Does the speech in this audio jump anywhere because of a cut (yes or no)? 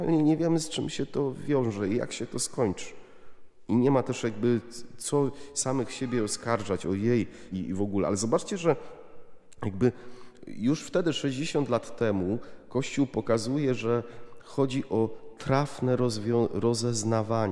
yes